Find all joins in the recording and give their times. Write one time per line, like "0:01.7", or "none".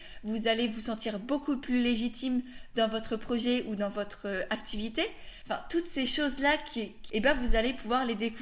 0:05.4
0:07.1